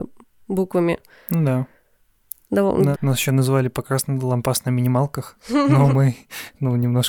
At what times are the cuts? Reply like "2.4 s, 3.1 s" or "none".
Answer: 2.9 s